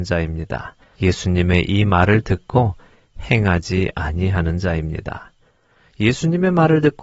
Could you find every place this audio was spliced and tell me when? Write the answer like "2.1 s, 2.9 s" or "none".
0.9 s